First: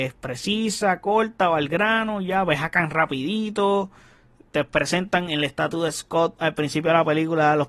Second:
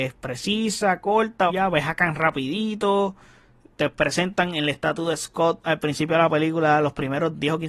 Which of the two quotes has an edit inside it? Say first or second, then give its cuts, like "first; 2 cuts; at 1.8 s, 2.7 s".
second; 1 cut; at 1.5 s